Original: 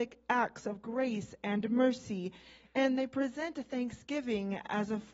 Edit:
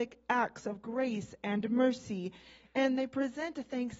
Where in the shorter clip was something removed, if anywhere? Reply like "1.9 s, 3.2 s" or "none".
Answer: none